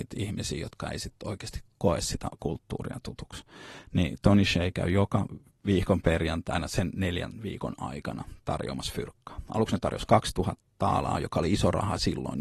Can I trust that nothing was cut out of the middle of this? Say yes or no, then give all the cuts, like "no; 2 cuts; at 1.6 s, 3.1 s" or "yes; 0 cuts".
yes; 0 cuts